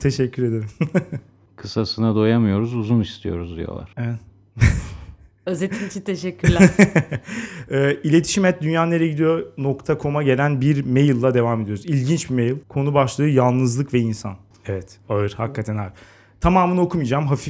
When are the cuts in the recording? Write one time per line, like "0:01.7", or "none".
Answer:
0:03.9
0:12.6
0:14.5